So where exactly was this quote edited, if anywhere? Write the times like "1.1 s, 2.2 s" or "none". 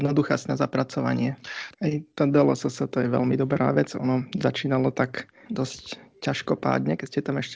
1.7 s, 5.5 s

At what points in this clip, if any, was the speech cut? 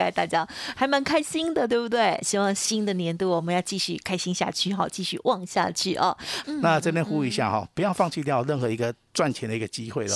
6.4 s

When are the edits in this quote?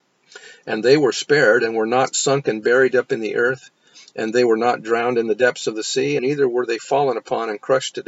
6.2 s

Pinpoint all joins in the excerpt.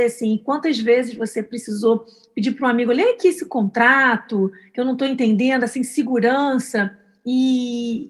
none

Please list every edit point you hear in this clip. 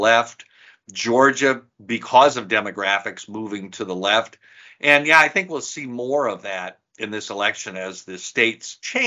none

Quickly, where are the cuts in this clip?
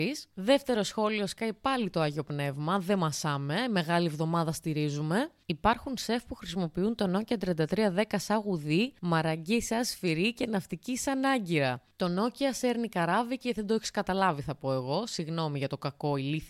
none

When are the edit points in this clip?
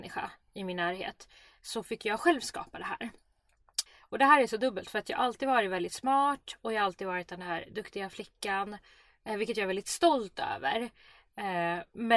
3.9 s

